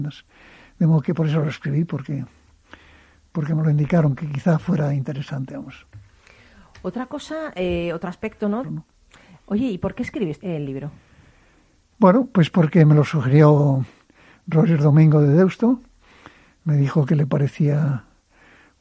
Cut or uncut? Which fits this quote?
cut